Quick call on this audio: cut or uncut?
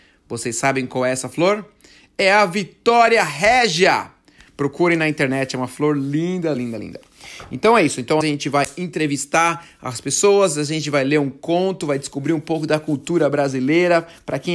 cut